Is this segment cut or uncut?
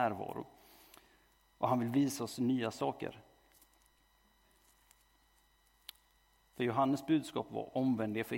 uncut